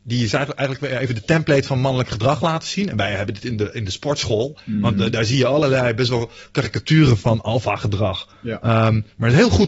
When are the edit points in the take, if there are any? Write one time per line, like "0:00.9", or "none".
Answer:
none